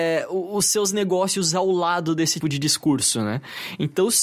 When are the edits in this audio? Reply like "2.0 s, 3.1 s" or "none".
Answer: 2.4 s